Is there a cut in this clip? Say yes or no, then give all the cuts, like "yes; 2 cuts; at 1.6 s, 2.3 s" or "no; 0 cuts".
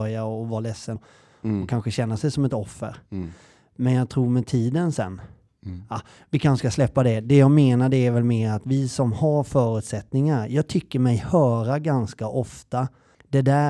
yes; 1 cut; at 1.0 s